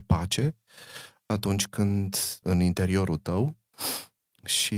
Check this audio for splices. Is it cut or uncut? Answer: cut